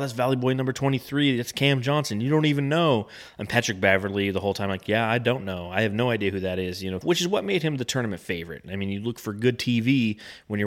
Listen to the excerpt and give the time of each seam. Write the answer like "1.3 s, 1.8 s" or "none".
7.0 s